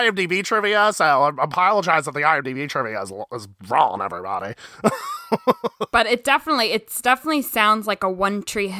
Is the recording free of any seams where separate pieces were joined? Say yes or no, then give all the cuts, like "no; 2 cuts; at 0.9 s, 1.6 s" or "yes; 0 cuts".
yes; 0 cuts